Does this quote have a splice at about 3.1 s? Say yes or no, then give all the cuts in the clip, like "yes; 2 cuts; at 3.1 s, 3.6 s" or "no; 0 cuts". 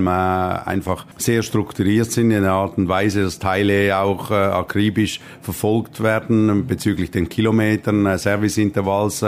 no; 0 cuts